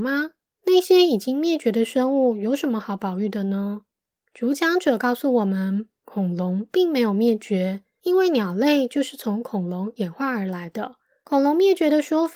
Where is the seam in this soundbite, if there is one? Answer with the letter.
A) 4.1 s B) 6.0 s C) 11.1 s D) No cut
D